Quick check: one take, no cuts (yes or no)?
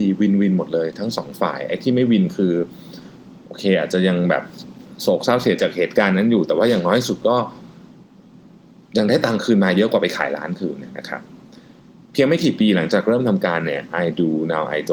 no